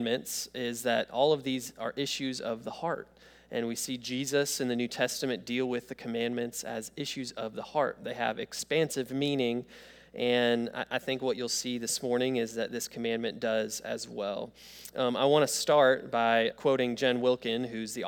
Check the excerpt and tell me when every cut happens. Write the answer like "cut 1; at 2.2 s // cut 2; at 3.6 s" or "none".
cut 1; at 16.5 s